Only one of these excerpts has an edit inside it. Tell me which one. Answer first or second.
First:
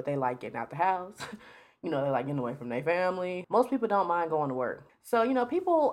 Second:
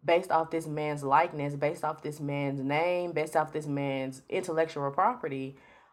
first